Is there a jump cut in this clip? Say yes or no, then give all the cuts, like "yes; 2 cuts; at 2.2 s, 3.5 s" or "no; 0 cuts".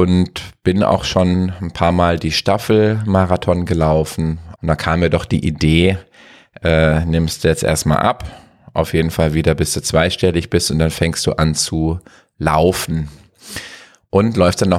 yes; 1 cut; at 4.6 s